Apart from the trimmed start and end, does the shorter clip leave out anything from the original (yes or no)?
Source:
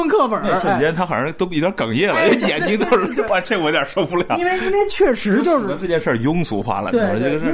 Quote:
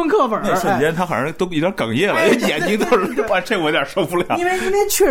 no